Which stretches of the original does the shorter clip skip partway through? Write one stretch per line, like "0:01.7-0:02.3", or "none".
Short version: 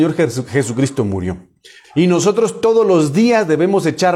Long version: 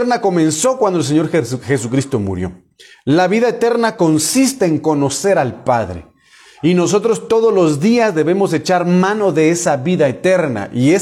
0:03.0-0:06.5